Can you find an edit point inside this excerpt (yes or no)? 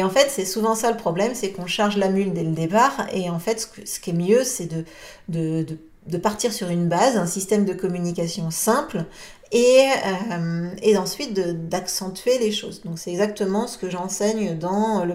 no